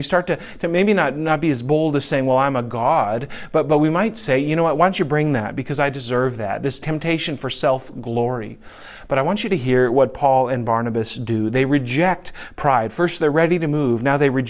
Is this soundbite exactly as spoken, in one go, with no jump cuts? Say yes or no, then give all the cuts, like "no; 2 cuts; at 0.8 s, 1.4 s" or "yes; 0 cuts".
yes; 0 cuts